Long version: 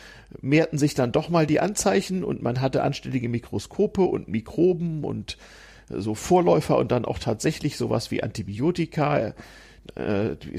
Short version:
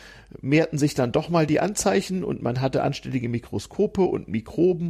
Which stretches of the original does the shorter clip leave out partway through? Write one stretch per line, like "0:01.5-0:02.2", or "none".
none